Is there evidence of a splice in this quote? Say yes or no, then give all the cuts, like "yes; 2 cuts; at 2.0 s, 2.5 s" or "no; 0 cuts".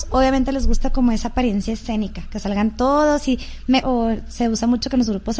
yes; 1 cut; at 3.8 s